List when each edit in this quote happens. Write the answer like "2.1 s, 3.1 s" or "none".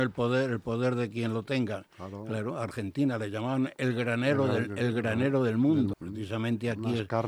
5.9 s